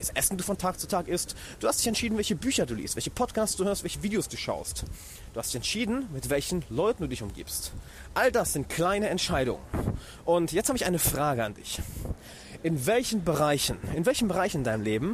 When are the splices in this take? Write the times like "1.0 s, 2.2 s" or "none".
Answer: none